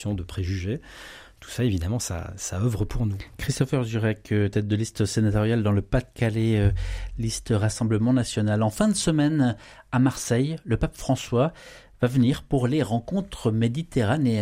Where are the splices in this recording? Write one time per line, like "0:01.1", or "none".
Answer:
none

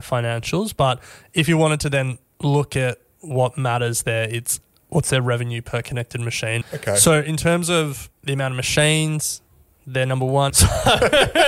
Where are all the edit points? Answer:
0:06.6
0:10.5

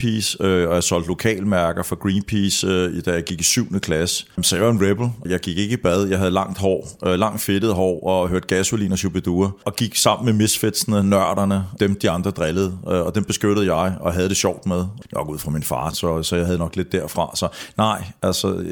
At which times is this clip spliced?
0:15.9

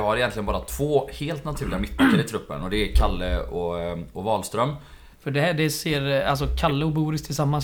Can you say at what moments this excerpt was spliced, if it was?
0:05.1

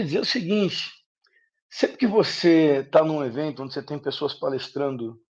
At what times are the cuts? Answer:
none

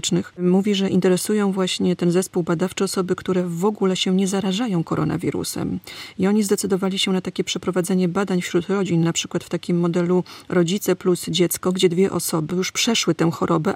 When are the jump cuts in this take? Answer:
none

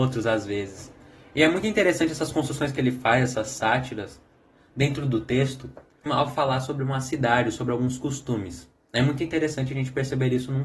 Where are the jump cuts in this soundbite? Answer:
0:06.1

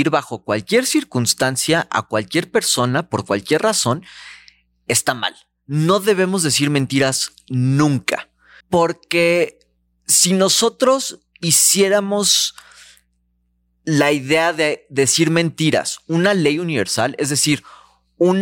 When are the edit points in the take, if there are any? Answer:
0:08.6

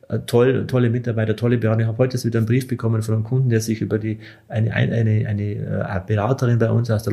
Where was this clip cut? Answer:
none

